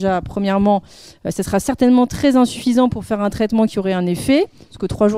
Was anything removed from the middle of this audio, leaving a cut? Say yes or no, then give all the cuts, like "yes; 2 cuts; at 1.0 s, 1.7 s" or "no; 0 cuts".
no; 0 cuts